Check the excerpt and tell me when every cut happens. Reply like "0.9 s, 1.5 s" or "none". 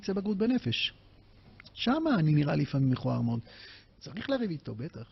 3.9 s